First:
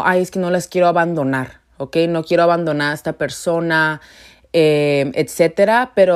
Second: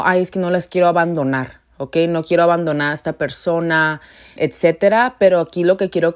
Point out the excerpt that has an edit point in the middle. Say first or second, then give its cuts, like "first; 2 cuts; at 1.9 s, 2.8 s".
second; 1 cut; at 4.4 s